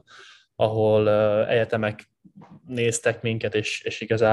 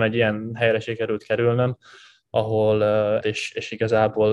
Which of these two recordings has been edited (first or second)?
second